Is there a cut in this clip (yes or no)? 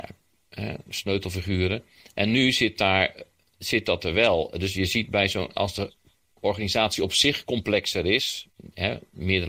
no